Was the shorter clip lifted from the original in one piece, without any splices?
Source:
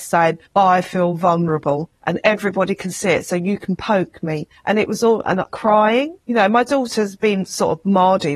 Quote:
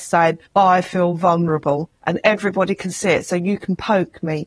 yes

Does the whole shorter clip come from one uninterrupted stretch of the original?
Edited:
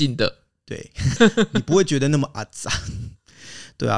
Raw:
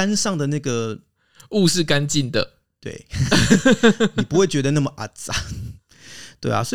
no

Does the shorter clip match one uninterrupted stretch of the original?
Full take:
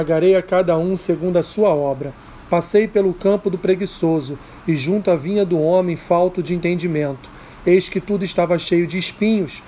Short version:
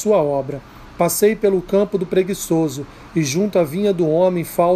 yes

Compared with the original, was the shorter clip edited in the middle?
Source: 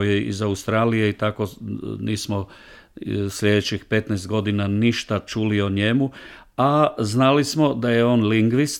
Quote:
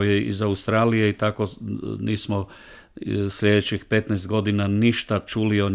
no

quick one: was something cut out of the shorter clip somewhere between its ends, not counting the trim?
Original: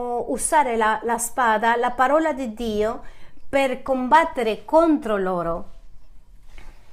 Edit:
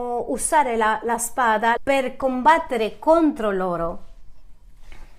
yes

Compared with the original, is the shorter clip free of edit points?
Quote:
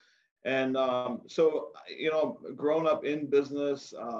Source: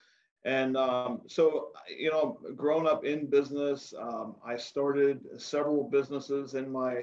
yes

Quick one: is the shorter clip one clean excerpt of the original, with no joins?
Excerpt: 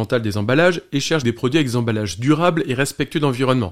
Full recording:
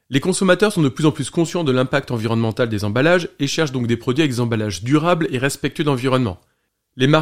no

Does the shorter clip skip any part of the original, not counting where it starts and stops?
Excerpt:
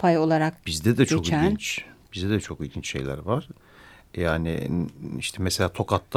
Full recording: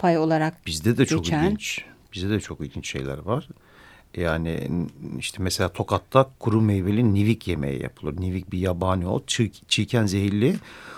no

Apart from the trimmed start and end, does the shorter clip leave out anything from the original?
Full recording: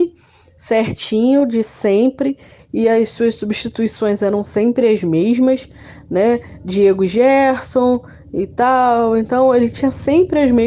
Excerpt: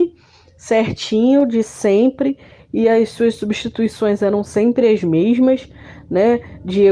no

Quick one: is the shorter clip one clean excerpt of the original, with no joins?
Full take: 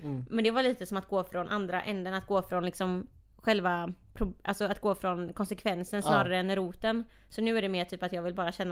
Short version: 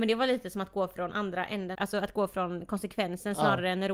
no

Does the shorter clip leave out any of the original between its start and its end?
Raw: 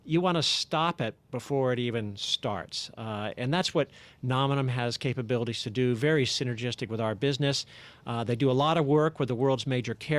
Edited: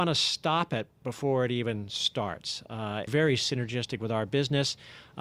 yes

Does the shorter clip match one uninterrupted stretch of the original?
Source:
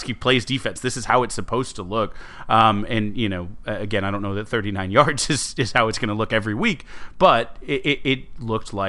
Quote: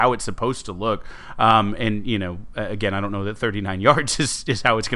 yes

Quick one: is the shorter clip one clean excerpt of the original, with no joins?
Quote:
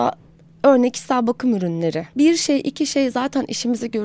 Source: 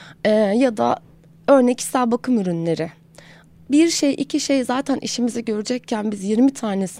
no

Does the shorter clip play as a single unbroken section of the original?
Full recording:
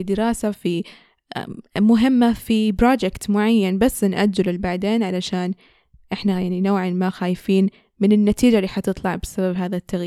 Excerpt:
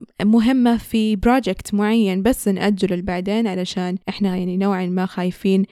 no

